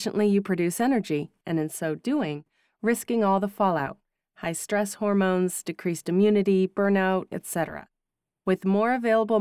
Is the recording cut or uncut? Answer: cut